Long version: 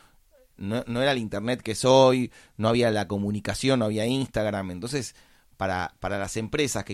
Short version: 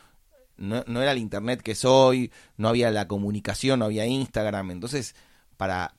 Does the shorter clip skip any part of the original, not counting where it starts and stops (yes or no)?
no